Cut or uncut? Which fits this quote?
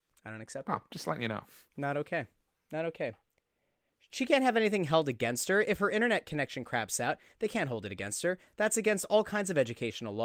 uncut